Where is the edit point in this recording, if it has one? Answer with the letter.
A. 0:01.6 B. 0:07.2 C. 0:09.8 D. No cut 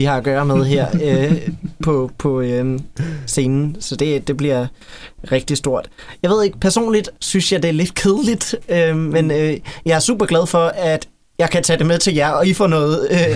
B